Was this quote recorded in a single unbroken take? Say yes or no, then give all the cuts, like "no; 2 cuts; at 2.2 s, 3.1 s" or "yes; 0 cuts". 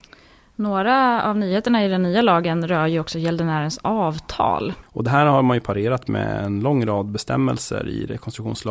no; 1 cut; at 4.8 s